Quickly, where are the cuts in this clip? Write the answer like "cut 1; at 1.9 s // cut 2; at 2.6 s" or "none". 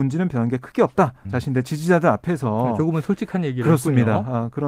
cut 1; at 1.2 s